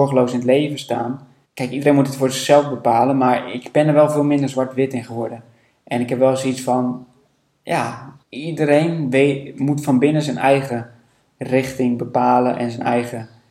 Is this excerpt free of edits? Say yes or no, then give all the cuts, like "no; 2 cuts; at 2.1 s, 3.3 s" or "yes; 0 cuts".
no; 2 cuts; at 1.4 s, 8.2 s